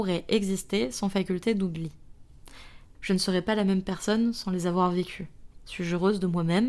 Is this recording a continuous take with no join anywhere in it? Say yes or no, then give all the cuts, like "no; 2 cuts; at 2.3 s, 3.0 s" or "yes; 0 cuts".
no; 1 cut; at 2.9 s